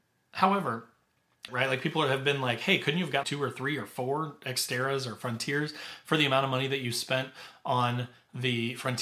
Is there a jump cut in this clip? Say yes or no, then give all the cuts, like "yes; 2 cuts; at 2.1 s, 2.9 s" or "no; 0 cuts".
yes; 2 cuts; at 1.5 s, 3.2 s